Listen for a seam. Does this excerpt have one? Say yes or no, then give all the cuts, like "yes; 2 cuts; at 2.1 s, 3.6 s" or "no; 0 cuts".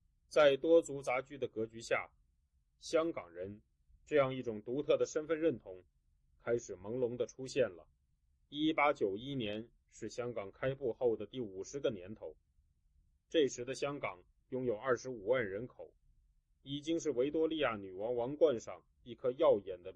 no; 0 cuts